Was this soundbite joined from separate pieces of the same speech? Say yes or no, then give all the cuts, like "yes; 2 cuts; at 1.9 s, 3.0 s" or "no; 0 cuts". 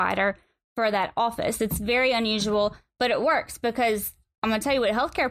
no; 0 cuts